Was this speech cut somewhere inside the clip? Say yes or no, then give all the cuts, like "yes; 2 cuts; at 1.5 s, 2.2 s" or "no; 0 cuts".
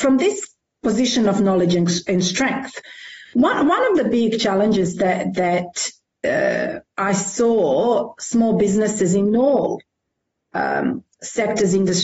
no; 0 cuts